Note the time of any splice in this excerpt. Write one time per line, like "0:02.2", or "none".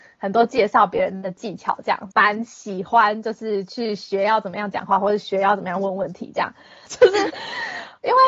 0:02.1
0:06.9